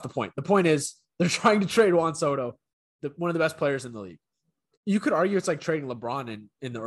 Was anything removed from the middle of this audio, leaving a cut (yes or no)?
yes